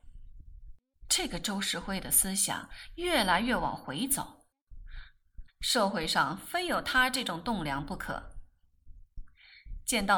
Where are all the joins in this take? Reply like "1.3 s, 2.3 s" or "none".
1.1 s, 5.5 s